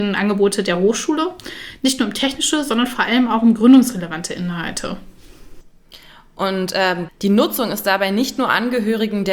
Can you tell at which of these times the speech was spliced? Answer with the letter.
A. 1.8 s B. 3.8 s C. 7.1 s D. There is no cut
C